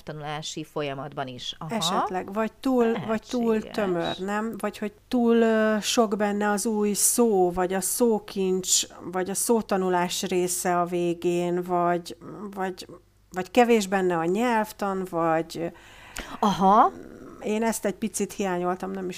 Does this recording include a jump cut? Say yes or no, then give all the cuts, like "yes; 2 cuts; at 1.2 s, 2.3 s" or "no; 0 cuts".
no; 0 cuts